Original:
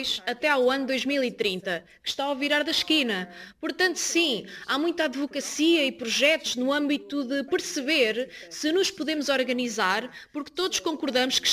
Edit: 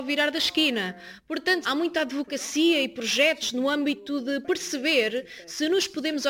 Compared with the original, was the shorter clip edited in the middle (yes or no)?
yes